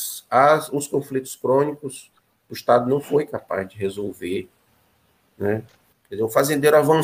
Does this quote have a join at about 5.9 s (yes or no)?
yes